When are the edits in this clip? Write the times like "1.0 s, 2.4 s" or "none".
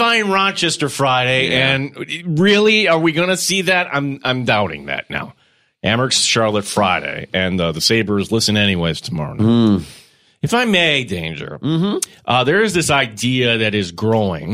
none

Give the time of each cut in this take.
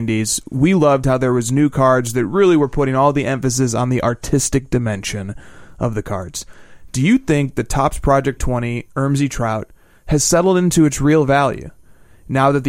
6.9 s, 8.4 s

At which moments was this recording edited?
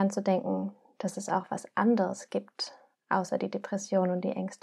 2.9 s

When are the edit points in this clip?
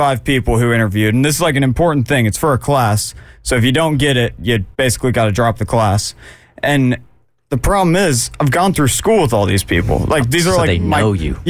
4.7 s

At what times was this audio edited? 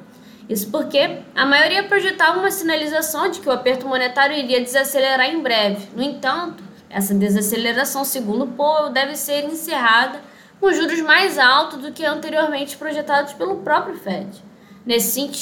none

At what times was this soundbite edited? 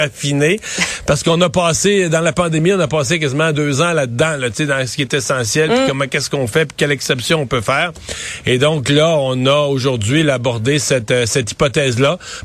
none

